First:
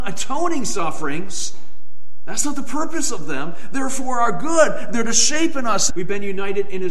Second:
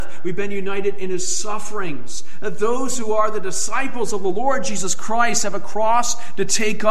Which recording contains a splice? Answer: first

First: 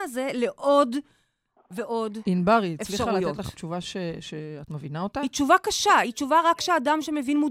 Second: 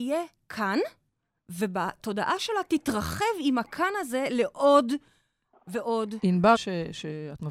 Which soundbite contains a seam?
second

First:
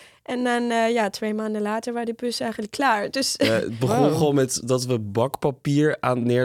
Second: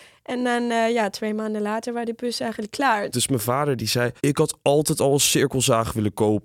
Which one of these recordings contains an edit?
second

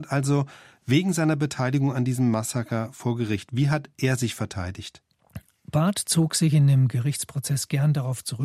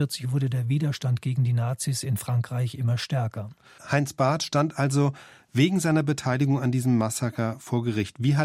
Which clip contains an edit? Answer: second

